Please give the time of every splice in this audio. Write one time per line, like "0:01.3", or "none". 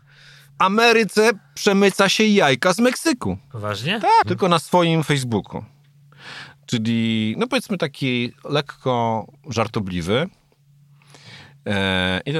0:04.2